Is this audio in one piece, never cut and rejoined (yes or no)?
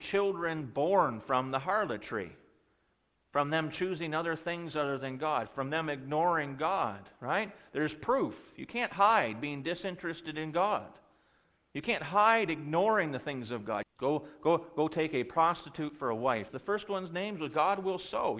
no